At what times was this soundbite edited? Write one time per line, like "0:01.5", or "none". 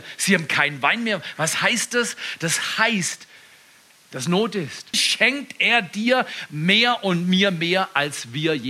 0:04.9

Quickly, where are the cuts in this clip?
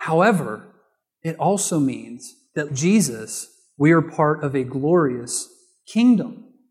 0:02.7

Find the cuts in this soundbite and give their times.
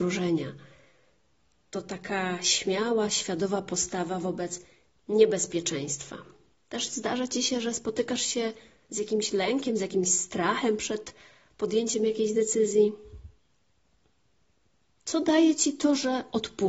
0:06.5

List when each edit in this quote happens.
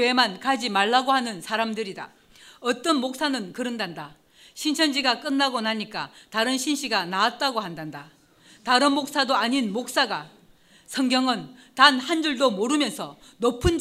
none

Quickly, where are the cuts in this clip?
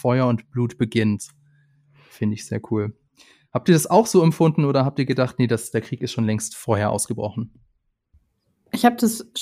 none

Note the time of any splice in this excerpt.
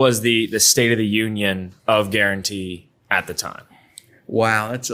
0:01.8

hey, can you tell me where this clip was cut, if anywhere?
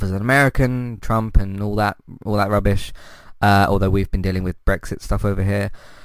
none

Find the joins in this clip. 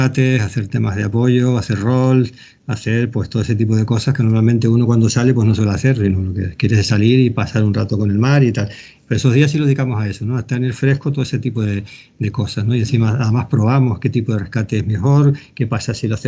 none

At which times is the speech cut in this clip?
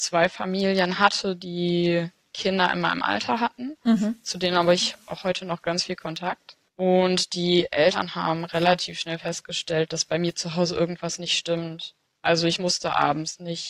none

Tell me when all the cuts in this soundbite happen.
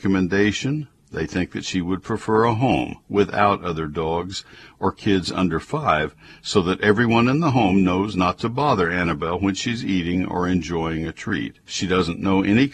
0:11.6

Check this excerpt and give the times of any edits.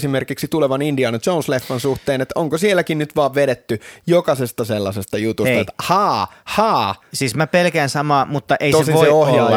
none

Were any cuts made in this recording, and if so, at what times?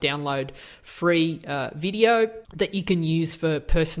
0:02.4

